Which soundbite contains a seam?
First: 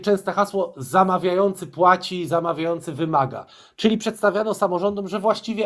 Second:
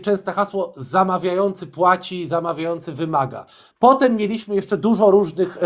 second; 1 cut; at 3.7 s

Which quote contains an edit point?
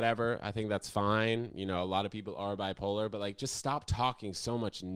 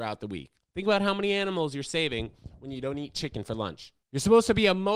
second; 1 cut; at 4.0 s

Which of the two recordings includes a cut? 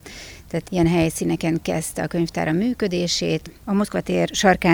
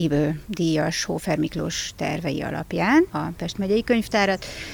first; 1 cut; at 3.6 s

